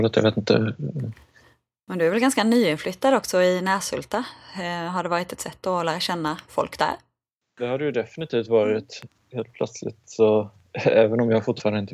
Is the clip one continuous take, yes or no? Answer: yes